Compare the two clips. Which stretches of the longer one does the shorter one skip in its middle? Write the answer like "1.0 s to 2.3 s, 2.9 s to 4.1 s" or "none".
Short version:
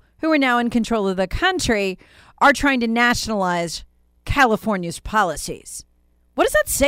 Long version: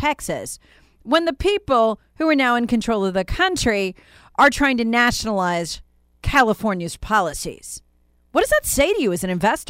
none